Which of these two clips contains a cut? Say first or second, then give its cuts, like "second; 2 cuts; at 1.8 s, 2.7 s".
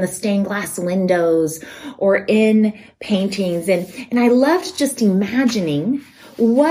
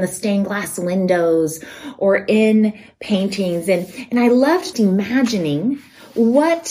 second; 1 cut; at 4.7 s